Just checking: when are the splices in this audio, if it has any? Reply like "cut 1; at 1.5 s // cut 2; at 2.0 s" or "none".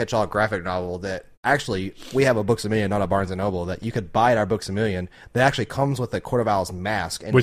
cut 1; at 1.3 s